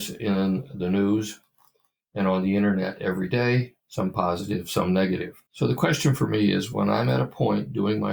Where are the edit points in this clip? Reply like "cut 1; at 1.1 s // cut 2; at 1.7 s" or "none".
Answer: cut 1; at 3.8 s // cut 2; at 5.5 s